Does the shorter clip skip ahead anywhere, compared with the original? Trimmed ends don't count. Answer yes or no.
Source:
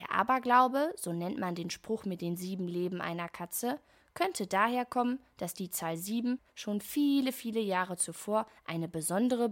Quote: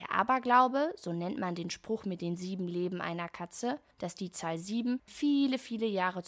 yes